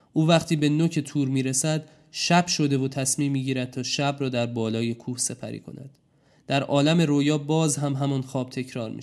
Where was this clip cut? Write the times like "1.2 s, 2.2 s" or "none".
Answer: none